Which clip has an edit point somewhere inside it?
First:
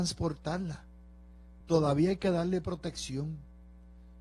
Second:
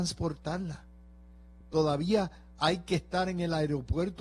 second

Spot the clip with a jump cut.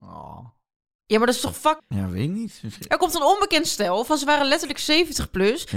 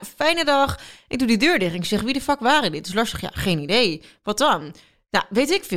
first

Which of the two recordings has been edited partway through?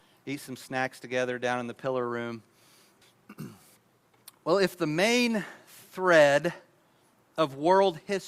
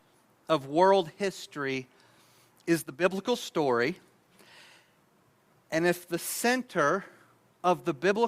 first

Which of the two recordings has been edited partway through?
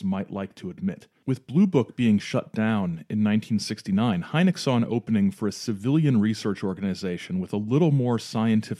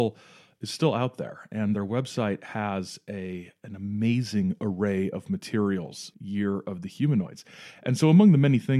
second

